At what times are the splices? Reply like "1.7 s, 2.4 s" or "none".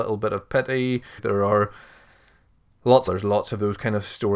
1.2 s, 3.1 s